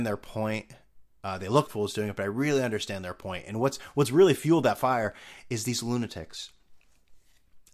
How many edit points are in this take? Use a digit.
1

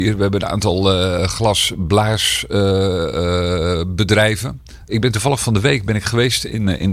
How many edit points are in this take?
1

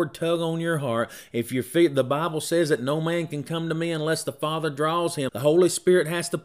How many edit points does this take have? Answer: 1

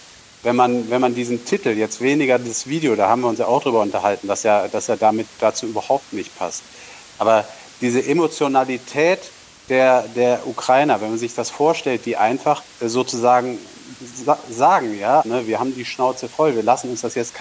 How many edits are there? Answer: 2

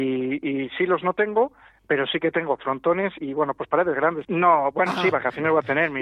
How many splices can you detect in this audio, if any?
2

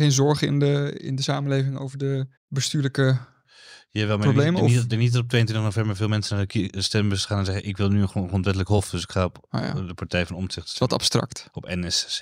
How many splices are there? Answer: 1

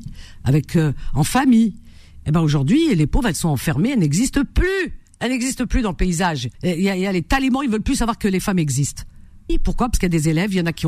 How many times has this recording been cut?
2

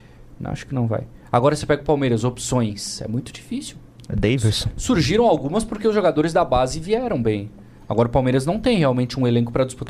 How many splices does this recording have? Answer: 0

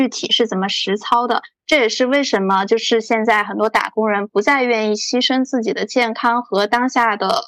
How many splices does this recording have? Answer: 1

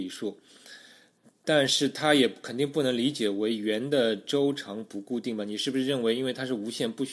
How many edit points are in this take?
0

